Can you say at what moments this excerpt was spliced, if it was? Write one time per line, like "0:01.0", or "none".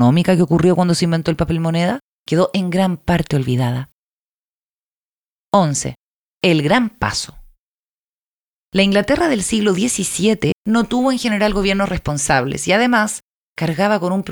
0:10.5